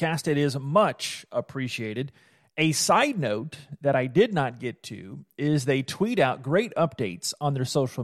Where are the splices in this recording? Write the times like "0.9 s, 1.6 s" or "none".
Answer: none